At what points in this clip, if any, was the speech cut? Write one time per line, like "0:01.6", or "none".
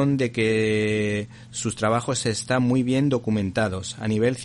none